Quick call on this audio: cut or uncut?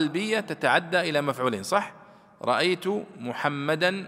uncut